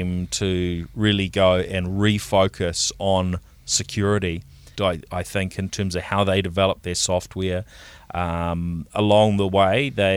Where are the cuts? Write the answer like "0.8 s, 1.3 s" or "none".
4.7 s